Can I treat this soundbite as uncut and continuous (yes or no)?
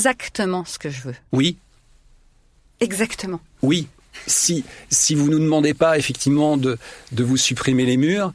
yes